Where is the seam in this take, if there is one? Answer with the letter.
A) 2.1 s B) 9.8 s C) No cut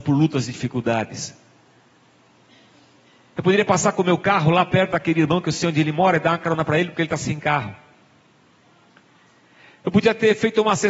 C